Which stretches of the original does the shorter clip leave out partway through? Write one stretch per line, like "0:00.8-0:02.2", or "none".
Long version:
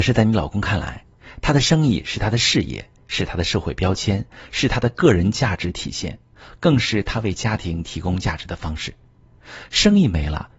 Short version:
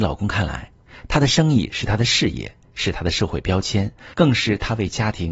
0:04.5-0:06.6